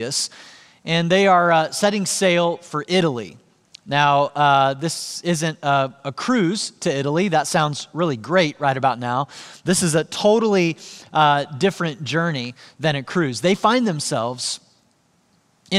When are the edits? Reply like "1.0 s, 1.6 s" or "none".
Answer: none